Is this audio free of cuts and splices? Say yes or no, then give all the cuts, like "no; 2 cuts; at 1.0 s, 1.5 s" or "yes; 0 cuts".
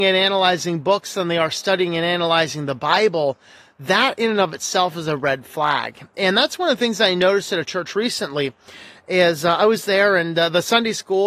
yes; 0 cuts